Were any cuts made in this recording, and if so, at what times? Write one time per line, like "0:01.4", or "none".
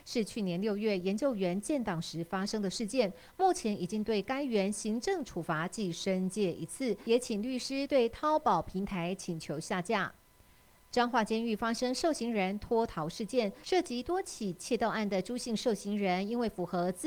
none